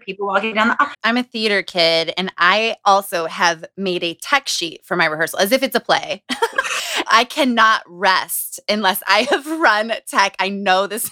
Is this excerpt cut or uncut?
cut